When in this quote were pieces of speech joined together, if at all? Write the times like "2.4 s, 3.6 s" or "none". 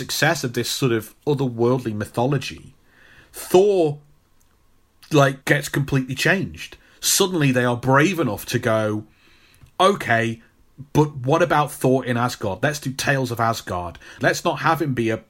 5.4 s, 14.2 s